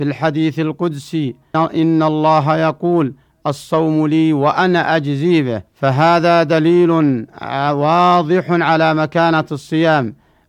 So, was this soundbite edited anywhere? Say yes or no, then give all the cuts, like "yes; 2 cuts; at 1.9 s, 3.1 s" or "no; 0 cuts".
yes; 2 cuts; at 1.5 s, 5.7 s